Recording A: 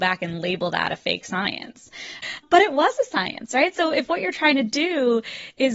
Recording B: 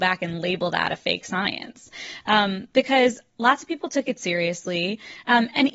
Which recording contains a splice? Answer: A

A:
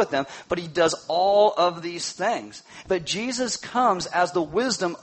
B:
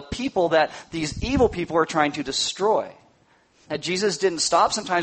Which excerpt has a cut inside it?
A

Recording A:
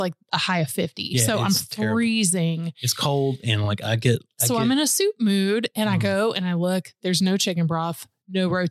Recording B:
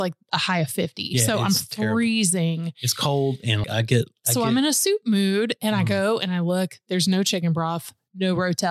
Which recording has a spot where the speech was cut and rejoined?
B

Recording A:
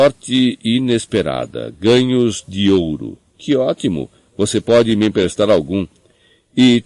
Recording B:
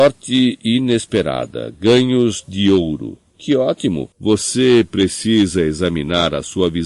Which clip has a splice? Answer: B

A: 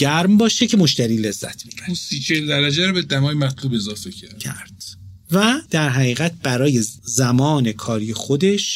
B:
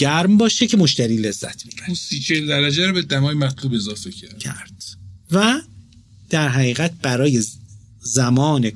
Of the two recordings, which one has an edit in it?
A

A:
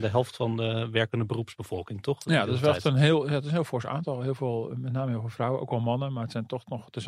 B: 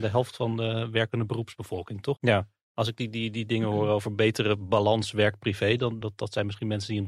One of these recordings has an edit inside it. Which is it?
B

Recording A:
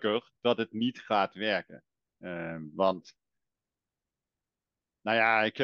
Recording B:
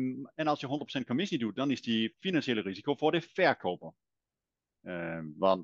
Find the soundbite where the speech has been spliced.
B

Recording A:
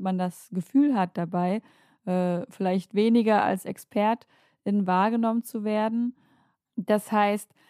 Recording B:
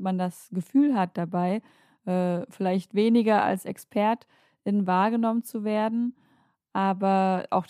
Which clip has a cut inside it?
A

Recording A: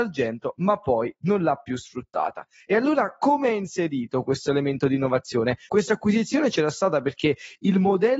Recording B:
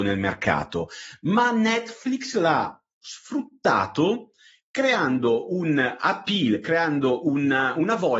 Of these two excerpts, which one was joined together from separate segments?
A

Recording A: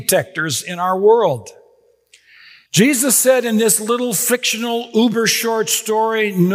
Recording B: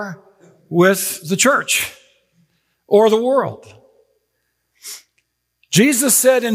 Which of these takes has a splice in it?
A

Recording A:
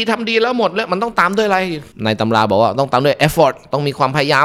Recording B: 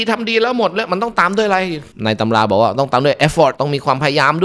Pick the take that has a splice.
B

